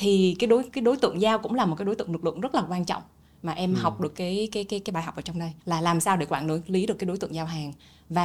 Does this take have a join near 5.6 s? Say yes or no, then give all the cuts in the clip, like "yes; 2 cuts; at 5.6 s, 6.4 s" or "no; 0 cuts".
yes; 1 cut; at 5.6 s